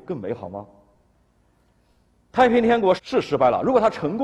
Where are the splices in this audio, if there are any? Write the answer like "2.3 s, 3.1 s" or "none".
3.0 s